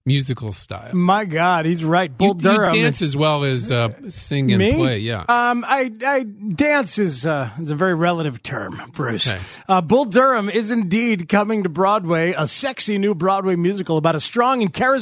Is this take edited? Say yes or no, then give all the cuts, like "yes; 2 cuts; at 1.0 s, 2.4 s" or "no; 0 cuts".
no; 0 cuts